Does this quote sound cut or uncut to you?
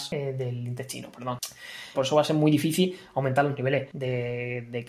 cut